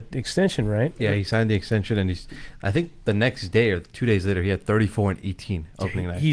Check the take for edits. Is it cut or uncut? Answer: uncut